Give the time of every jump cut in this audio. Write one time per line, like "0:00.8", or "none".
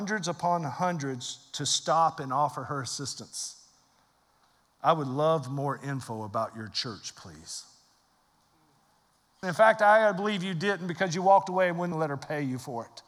0:04.6
0:09.4
0:11.9